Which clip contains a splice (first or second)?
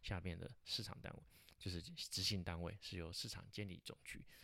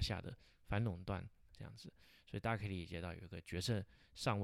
second